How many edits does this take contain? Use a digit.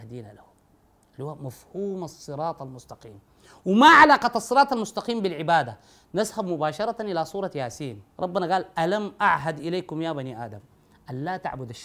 1